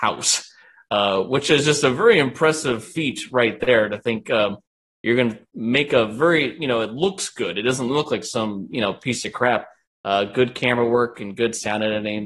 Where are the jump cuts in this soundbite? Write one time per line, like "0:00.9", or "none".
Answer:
none